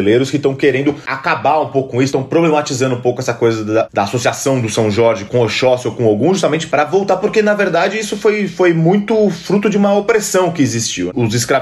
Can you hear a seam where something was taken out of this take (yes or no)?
no